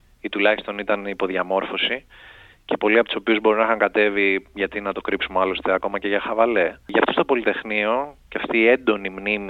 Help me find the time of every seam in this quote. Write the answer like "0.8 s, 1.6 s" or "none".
none

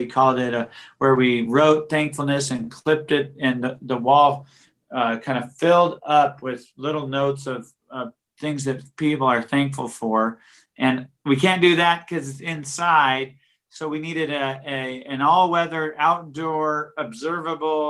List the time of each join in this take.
none

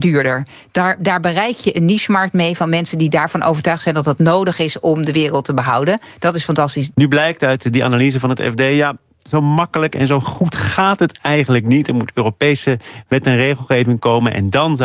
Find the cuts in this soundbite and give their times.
6.9 s

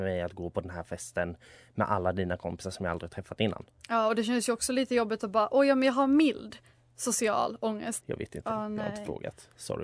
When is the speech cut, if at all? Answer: 8.0 s

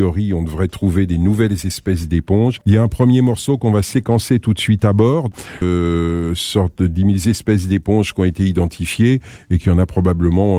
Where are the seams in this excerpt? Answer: 2.6 s, 5.6 s

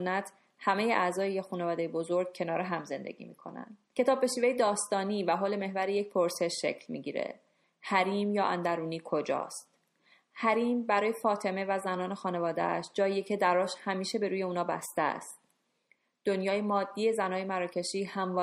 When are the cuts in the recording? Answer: 3.9 s

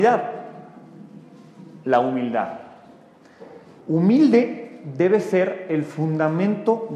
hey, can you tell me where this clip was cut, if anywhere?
1.8 s, 3.8 s

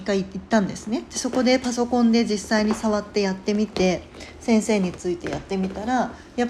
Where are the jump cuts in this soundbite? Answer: none

